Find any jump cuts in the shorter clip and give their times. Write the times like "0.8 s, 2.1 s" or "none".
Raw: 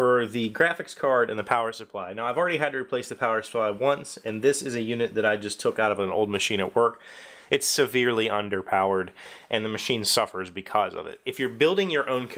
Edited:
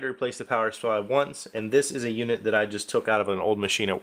none

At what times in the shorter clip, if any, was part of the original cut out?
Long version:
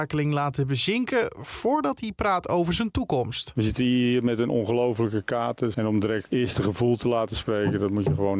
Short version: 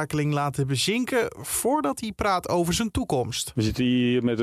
none

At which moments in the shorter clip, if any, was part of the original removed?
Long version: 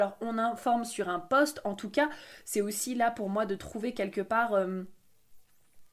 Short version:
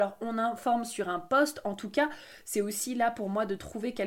none

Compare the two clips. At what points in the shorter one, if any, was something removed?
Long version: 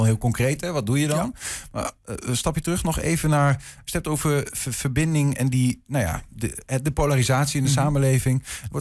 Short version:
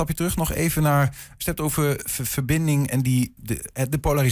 3.4 s

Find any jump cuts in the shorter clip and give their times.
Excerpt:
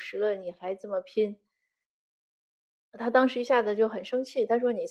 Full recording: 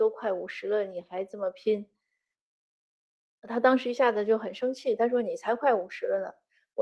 none

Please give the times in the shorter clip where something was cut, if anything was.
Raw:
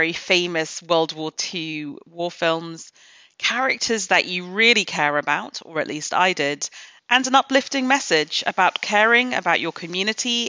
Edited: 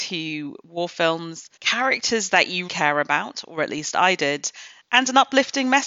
1.6 s, 2.7 s

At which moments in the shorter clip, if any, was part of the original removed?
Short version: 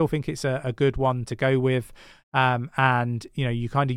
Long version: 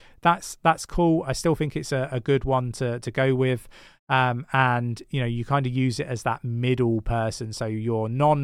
1.3 s

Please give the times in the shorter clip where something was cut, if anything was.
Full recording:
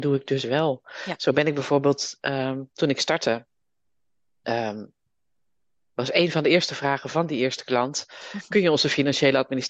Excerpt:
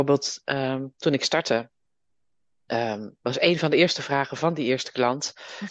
3.2 s

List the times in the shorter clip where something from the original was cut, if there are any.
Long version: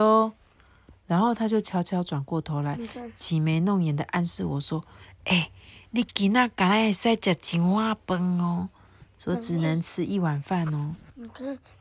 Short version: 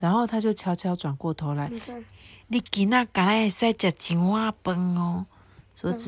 2.1 s

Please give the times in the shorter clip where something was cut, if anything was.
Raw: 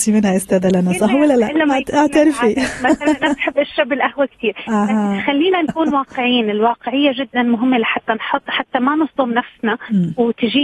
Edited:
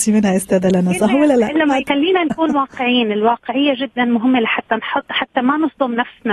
1.9 s

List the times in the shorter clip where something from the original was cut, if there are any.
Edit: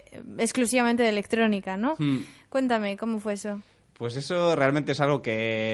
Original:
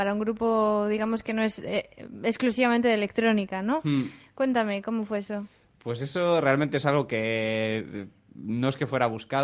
none

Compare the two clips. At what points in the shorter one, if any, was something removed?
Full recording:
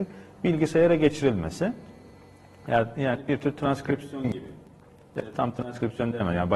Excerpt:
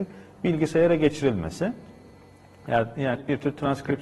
none

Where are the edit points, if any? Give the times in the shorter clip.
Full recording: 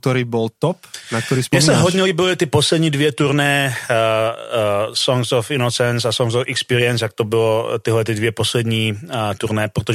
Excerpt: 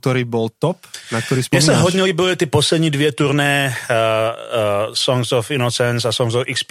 none

